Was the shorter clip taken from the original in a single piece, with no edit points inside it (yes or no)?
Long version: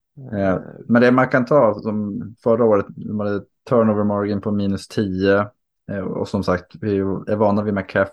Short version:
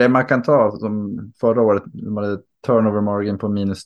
yes